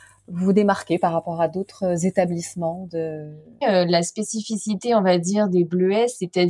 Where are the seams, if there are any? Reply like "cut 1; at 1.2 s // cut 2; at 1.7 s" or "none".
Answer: cut 1; at 3.6 s